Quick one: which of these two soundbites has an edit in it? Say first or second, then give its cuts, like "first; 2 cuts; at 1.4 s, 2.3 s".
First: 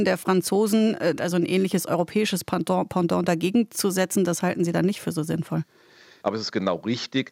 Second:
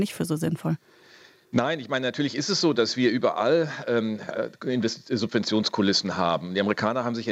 first; 2 cuts; at 1.2 s, 6.2 s